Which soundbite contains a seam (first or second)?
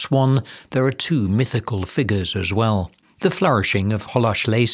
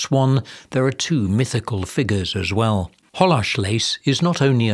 second